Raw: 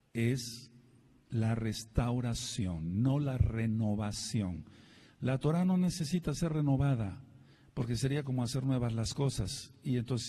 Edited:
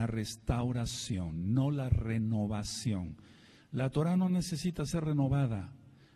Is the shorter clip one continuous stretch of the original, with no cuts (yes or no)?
yes